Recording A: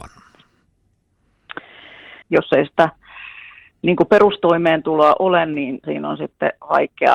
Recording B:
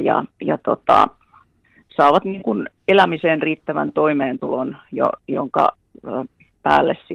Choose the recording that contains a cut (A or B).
A